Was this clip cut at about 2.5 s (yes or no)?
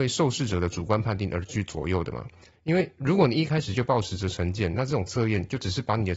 yes